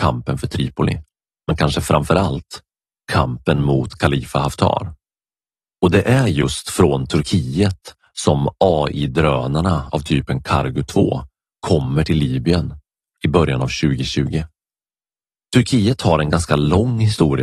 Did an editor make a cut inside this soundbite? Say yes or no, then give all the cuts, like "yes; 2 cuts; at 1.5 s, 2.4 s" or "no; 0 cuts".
no; 0 cuts